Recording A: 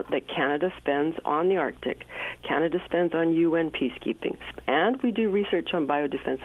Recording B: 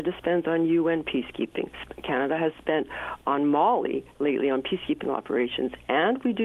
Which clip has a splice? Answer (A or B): A